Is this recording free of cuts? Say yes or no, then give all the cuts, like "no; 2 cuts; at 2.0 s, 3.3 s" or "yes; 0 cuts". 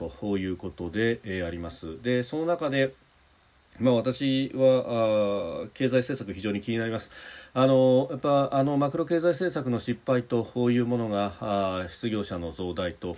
yes; 0 cuts